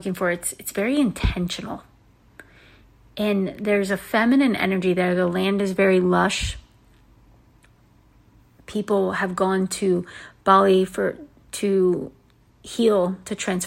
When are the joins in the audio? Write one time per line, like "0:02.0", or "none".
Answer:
none